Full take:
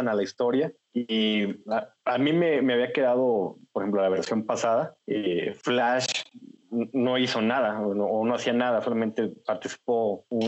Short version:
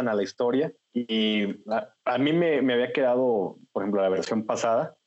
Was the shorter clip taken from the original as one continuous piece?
yes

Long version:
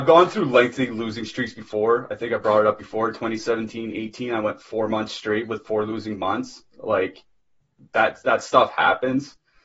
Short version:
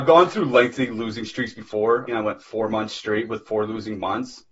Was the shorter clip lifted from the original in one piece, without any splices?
no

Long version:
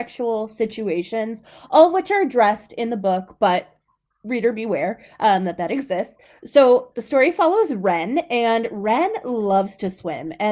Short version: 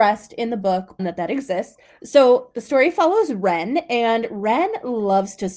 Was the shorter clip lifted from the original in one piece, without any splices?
no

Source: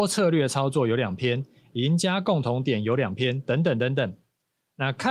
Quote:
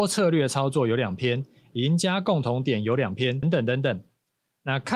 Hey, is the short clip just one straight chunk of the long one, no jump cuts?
no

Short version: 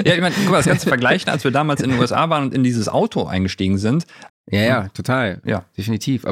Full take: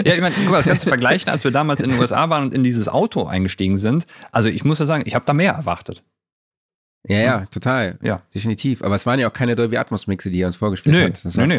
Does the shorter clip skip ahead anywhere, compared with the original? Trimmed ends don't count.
yes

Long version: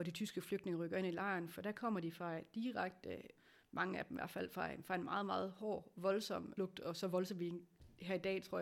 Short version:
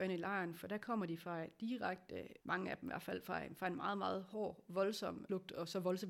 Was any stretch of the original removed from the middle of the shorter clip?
yes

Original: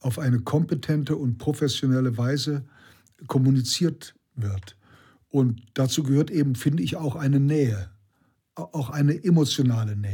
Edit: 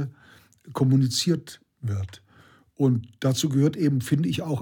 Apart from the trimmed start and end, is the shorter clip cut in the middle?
no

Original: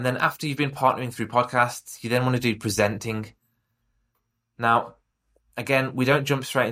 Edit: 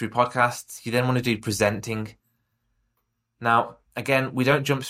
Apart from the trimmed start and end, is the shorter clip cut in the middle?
yes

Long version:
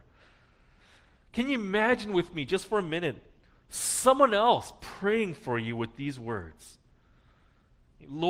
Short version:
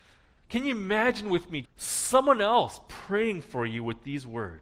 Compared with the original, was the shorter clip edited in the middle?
yes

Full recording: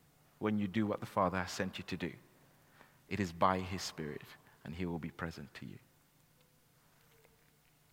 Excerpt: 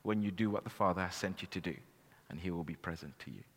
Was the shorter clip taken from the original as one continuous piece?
no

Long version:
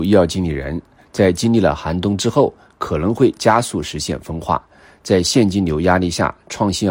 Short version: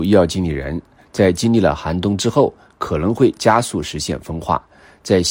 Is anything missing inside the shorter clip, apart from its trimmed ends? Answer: no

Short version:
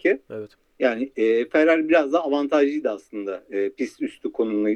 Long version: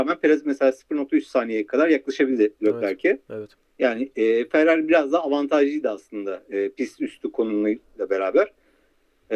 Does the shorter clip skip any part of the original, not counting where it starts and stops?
no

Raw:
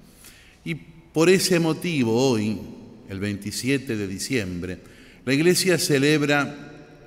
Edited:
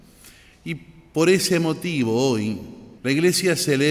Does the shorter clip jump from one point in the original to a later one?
yes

